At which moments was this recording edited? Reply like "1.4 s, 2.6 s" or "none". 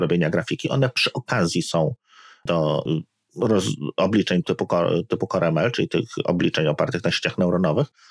4.4 s